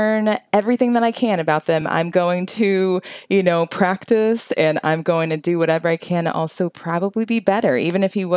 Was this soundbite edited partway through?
no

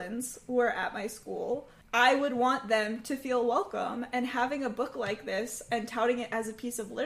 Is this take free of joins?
no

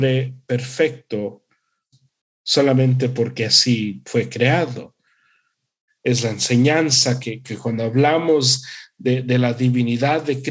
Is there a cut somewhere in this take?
yes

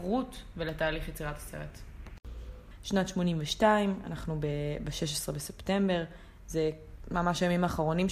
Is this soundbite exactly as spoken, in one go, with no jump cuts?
no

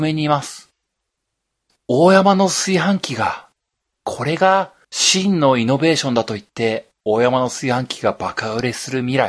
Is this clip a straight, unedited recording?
no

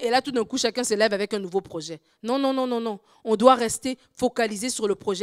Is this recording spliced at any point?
no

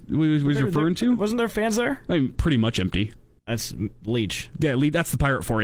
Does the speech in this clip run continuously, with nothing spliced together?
no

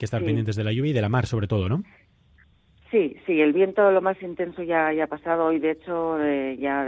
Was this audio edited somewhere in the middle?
no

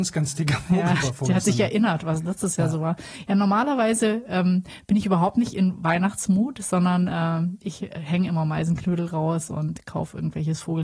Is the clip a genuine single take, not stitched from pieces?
yes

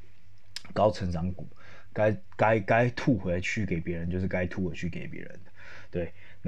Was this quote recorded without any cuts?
yes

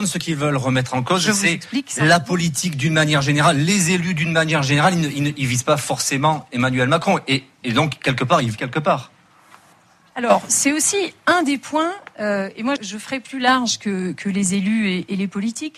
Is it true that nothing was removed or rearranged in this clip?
no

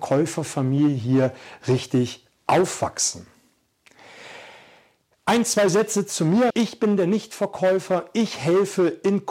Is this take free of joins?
no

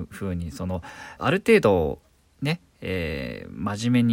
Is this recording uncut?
no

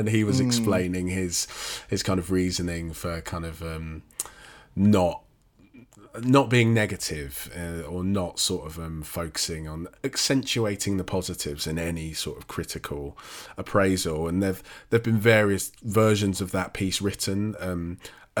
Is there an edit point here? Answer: no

